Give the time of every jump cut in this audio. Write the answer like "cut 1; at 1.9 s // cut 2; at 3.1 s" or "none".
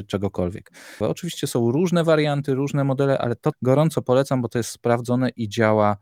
cut 1; at 1.0 s // cut 2; at 3.5 s